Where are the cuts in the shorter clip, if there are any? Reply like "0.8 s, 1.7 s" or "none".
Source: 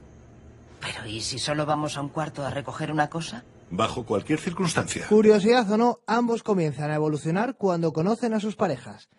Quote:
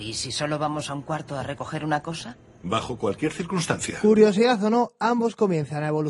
none